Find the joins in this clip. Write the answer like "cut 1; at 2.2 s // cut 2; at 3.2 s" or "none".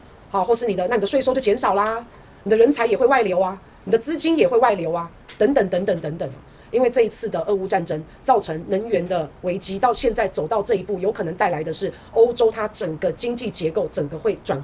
cut 1; at 6.6 s // cut 2; at 9.8 s